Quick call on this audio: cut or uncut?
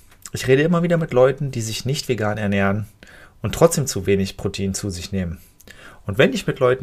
uncut